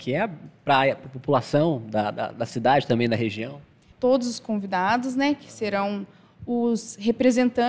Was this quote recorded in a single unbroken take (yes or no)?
no